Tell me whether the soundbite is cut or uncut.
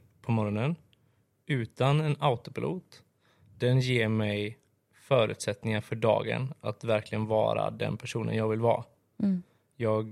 uncut